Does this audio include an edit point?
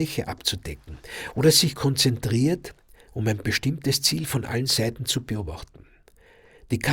no; 0 cuts

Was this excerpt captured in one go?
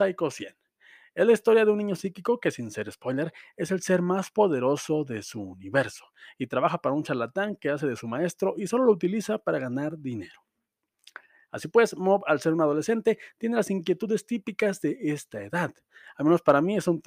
no; 2 cuts; at 3.5 s, 16.1 s

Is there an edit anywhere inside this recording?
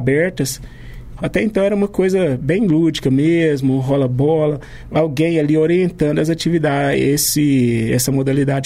yes; 2 cuts; at 1.2 s, 4.9 s

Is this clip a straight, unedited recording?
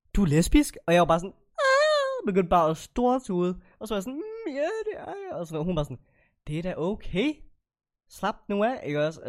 yes; 0 cuts

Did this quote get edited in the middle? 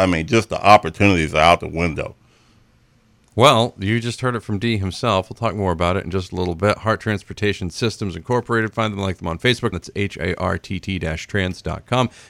yes; 1 cut; at 9.7 s

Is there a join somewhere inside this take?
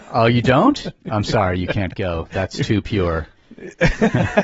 no; 0 cuts

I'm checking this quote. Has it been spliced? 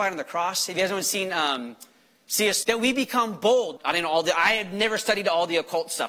yes; 2 cuts; at 2.6 s, 3.8 s

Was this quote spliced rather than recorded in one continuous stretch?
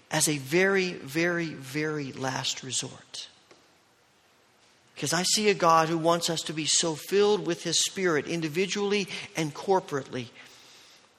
no; 0 cuts

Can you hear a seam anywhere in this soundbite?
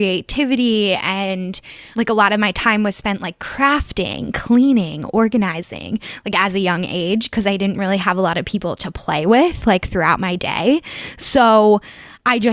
no; 0 cuts

